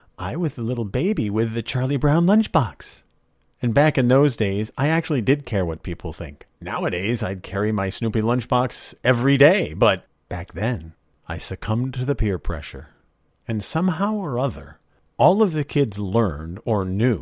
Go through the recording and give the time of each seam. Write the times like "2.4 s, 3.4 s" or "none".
13.3 s